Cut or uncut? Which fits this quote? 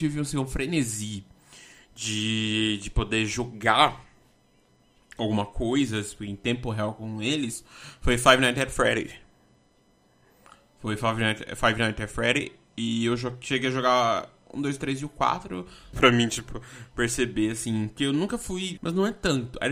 cut